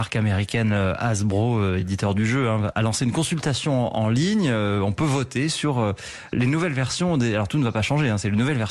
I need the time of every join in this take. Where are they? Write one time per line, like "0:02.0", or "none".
none

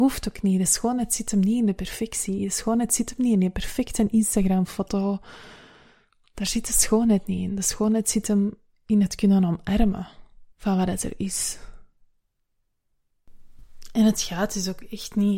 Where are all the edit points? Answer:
0:10.5

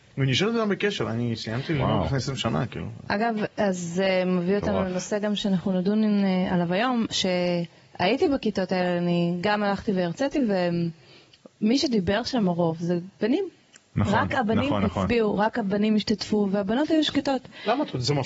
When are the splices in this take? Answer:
none

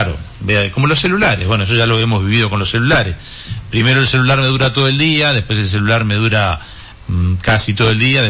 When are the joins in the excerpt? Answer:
none

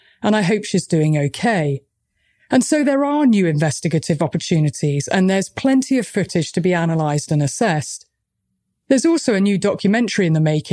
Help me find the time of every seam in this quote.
none

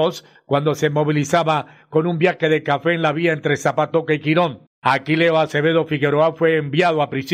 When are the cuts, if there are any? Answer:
none

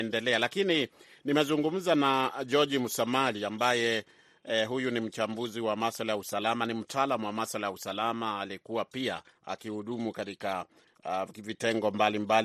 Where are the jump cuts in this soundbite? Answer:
none

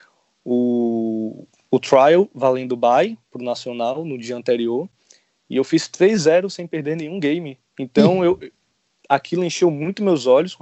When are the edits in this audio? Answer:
0:07.7

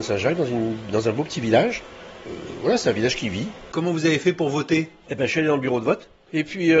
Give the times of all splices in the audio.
none

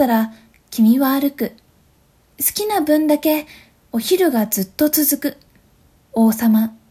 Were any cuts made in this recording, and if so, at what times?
0:06.0

